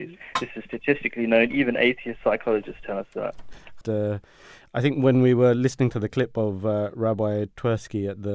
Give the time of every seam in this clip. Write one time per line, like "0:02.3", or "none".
0:03.8

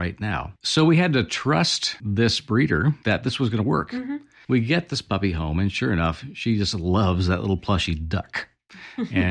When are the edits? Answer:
none

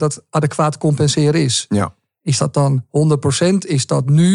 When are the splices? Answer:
none

